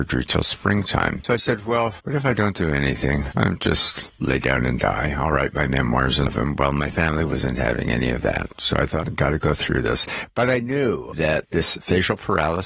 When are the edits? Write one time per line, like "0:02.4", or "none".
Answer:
0:01.2
0:09.0